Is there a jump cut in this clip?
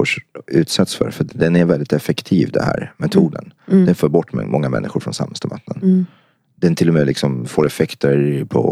no; 0 cuts

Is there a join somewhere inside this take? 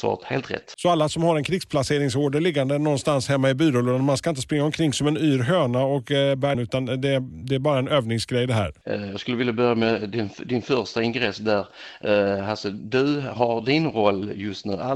yes; 2 cuts; at 6.5 s, 8.8 s

